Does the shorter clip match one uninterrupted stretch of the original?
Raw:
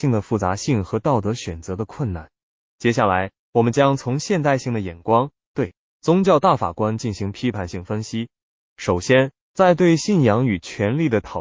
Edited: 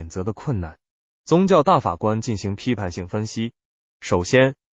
no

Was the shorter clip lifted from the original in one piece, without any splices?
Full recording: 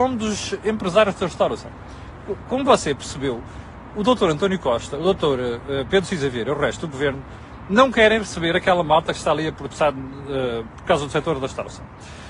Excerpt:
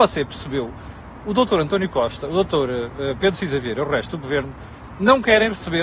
yes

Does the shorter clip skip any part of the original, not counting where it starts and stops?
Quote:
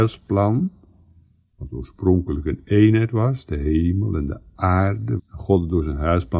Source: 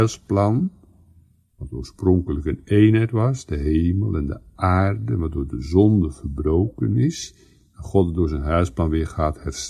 yes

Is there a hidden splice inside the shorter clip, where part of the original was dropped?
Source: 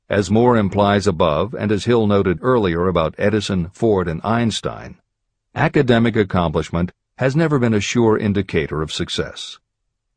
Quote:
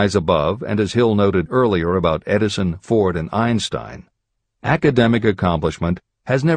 no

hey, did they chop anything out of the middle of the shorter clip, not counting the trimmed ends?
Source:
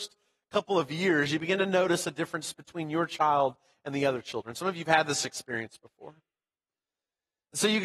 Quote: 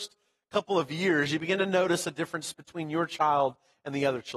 no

